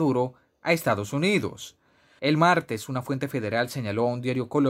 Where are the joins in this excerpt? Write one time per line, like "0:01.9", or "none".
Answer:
0:02.2